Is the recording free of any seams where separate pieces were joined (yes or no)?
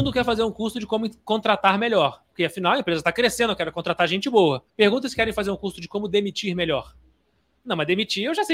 no